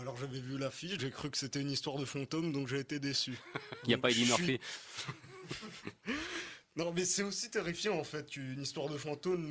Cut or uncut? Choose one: cut